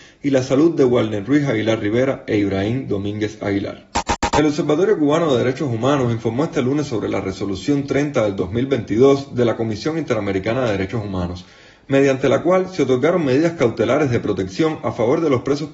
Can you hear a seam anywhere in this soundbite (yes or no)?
yes